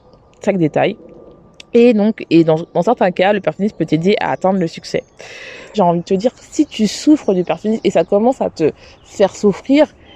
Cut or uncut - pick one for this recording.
cut